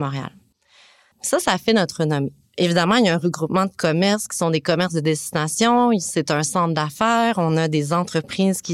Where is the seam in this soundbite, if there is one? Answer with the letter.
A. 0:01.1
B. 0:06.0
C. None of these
A